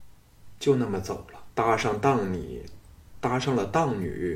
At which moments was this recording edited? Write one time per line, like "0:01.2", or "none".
0:01.5